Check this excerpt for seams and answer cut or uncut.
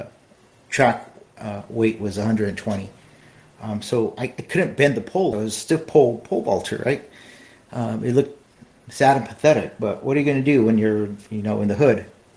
cut